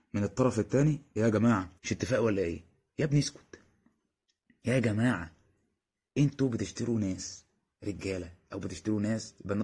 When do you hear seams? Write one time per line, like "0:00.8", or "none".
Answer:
0:01.8